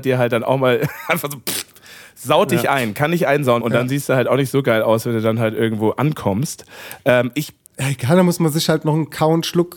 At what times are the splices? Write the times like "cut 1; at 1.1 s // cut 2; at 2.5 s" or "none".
cut 1; at 3.6 s